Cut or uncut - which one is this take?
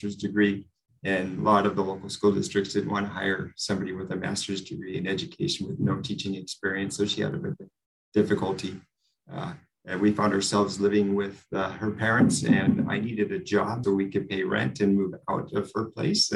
cut